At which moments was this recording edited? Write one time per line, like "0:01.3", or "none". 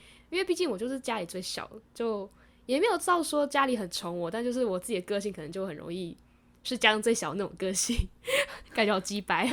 none